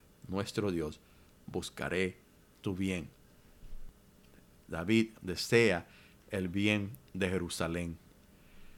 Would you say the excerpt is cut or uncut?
uncut